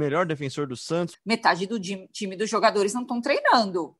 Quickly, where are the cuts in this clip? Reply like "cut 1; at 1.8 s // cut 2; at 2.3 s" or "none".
cut 1; at 1.1 s

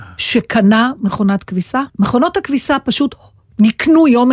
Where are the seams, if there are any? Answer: cut 1; at 1.9 s

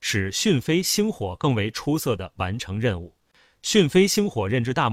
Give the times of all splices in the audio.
none

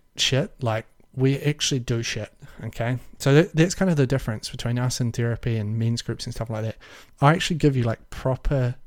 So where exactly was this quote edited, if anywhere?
none

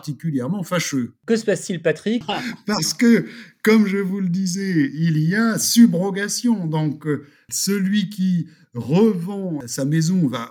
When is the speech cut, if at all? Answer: cut 1; at 2.2 s

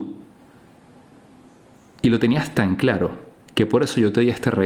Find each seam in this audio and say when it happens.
none

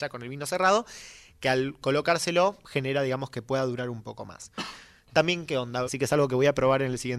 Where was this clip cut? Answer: cut 1; at 5.9 s

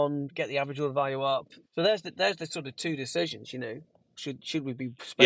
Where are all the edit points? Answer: cut 1; at 1.6 s // cut 2; at 4.2 s

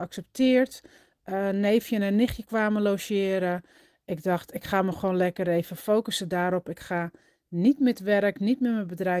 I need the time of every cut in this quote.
none

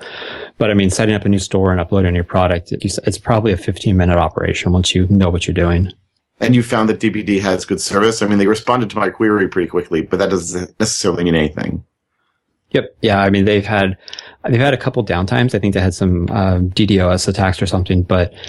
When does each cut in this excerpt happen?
cut 1; at 2.8 s

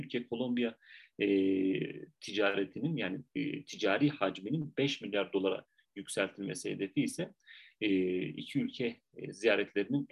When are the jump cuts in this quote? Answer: cut 1; at 5.9 s

